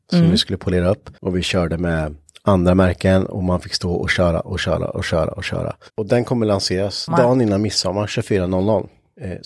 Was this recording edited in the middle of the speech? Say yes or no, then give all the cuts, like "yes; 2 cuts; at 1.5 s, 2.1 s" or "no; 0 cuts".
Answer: yes; 2 cuts; at 1.1 s, 5.9 s